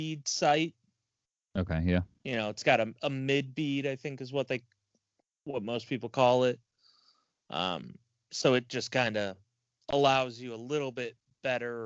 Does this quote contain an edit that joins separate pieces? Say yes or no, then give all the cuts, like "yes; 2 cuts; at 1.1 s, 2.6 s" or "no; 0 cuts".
no; 0 cuts